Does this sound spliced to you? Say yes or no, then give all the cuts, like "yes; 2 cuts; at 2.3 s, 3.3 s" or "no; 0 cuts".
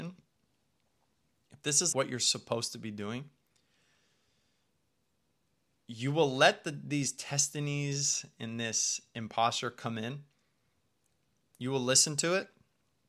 yes; 1 cut; at 1.9 s